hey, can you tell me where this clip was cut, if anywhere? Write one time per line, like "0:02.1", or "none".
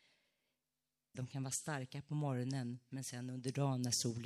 0:01.1